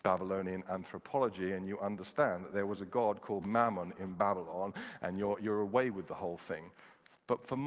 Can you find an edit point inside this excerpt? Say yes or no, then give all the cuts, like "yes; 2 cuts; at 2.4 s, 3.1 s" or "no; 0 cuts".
no; 0 cuts